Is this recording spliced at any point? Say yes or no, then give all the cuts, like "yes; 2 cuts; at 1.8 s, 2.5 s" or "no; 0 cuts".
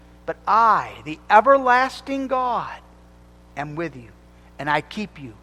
no; 0 cuts